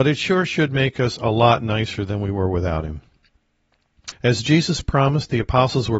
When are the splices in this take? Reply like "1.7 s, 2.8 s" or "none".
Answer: 4.1 s

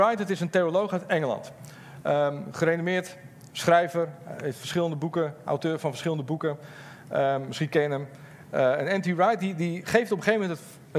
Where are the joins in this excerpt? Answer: none

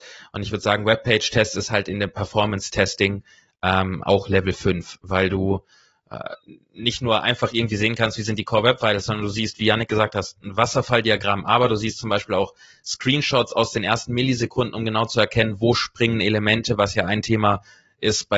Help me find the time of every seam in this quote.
none

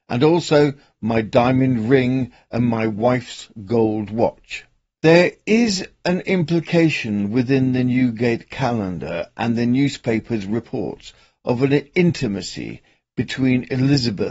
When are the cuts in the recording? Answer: 5.0 s

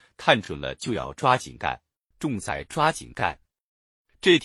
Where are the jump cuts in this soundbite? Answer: 2.1 s

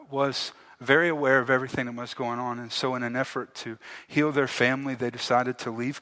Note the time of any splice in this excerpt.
none

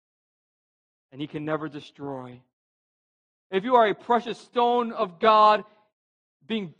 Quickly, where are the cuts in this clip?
3.3 s

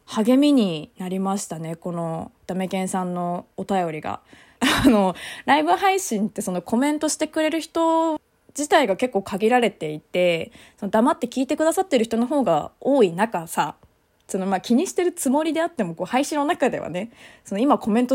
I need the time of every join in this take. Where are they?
4.6 s

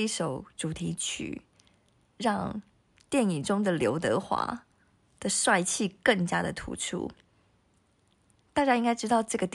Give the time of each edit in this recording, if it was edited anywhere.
none

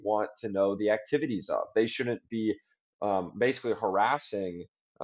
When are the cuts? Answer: none

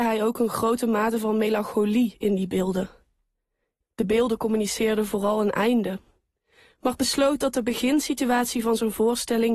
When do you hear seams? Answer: 3.8 s

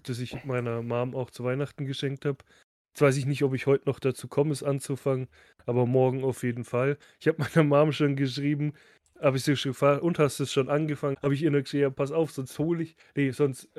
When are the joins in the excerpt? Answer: 11.1 s

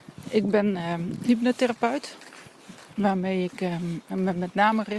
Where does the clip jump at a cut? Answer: none

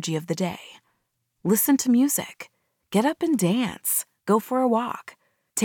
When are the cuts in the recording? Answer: none

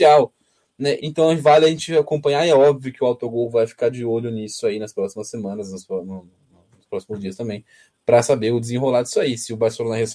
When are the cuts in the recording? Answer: 1.0 s

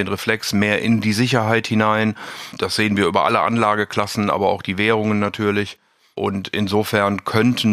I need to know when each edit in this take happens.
none

